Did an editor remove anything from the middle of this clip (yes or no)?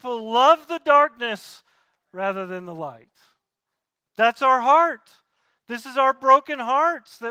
no